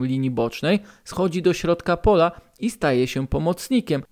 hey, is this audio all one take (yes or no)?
yes